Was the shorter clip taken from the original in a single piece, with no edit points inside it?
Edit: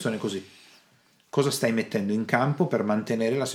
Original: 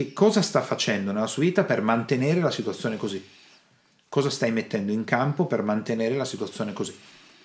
yes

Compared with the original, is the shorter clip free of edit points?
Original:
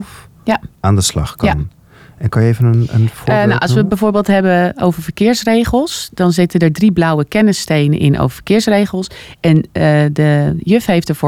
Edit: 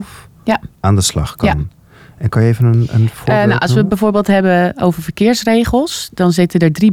yes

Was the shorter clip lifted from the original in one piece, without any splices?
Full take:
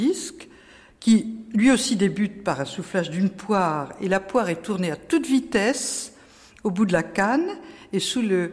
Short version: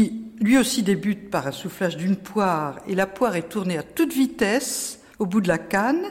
no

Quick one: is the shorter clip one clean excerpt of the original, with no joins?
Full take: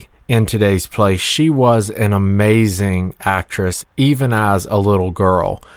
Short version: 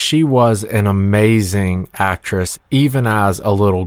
yes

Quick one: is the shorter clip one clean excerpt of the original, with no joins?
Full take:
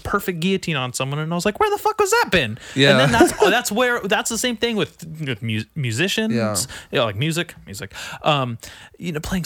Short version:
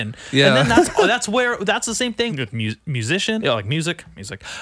no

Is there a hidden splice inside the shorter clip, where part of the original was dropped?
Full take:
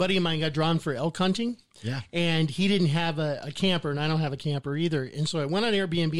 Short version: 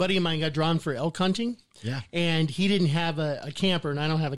no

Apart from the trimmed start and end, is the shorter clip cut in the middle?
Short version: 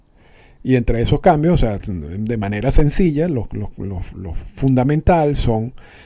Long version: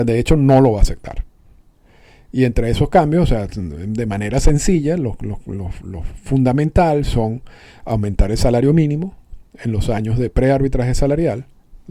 no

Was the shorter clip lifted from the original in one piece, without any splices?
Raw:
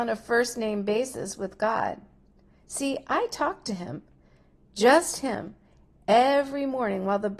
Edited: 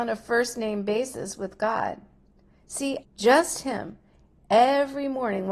no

